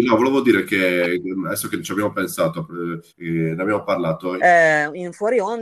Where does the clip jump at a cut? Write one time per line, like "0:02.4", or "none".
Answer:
0:03.1
0:04.4